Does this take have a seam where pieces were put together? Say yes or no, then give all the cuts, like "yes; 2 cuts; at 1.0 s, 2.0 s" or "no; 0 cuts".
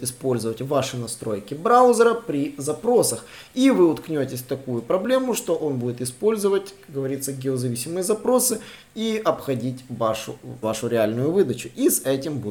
yes; 1 cut; at 10.6 s